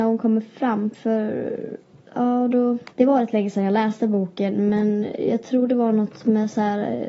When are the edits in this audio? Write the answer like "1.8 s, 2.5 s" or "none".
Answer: 2.9 s